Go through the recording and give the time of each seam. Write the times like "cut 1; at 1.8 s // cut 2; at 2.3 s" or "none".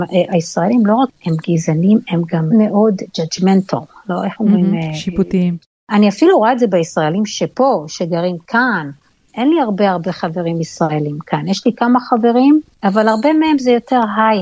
cut 1; at 2.5 s